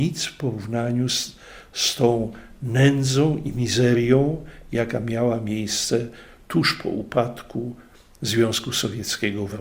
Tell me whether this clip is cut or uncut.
uncut